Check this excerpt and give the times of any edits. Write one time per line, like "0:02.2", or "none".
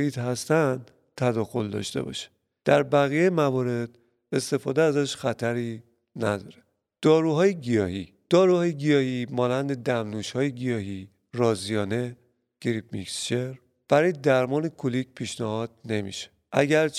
none